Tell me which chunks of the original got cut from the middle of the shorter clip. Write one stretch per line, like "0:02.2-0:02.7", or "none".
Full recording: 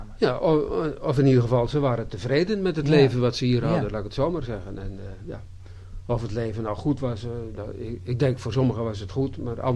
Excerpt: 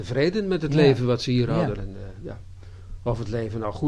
0:03.9-0:04.8